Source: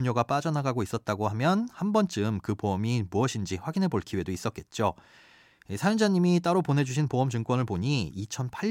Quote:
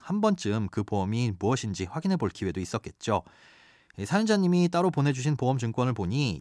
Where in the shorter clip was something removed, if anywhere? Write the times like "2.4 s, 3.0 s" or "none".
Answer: none